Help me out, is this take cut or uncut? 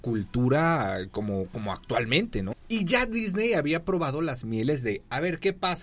cut